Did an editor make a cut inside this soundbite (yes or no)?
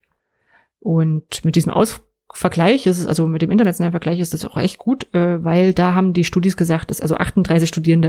no